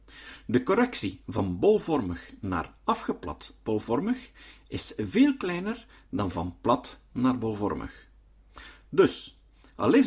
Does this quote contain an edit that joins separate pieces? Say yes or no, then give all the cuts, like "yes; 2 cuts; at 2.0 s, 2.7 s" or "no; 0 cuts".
no; 0 cuts